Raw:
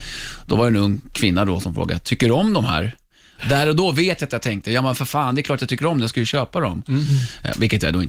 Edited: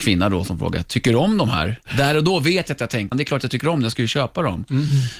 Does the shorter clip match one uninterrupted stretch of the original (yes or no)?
no